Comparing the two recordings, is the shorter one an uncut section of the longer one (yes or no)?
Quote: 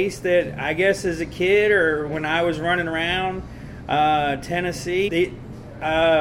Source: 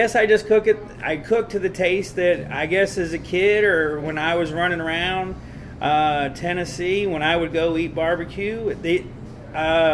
no